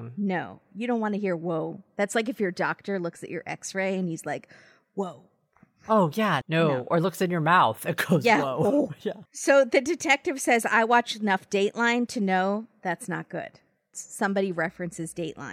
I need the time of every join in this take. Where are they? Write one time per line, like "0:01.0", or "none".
0:06.4
0:09.3
0:13.9